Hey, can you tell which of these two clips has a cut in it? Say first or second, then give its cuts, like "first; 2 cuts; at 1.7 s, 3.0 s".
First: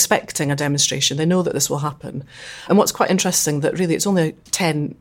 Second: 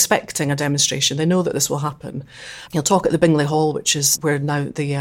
second; 1 cut; at 2.6 s